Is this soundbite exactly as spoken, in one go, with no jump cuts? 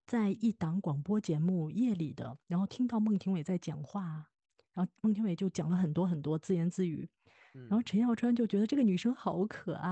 yes; 0 cuts

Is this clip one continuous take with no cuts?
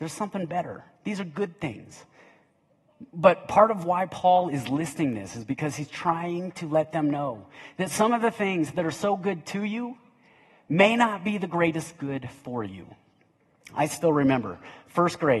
yes; 0 cuts

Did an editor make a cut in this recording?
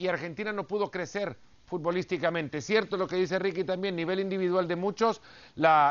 no; 0 cuts

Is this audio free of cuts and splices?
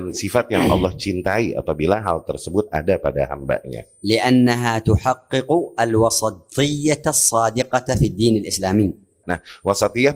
no; 1 cut; at 9.2 s

